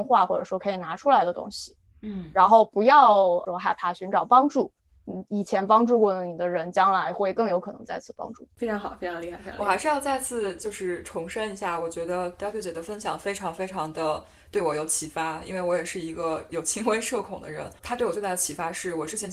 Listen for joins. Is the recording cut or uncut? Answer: uncut